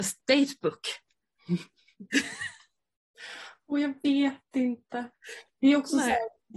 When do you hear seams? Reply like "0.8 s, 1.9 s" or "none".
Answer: none